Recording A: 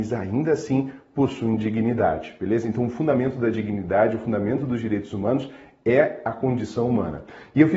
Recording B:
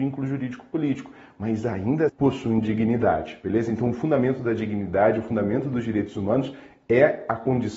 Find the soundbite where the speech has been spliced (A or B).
B